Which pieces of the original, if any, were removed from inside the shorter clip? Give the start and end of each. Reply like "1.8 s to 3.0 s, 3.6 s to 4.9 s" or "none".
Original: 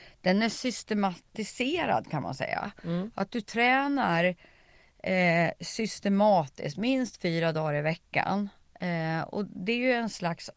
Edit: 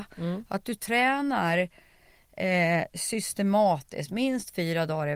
none